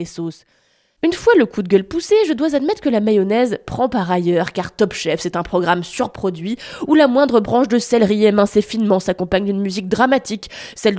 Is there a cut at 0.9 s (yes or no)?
no